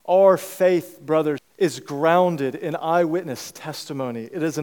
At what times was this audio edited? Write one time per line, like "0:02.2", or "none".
0:01.4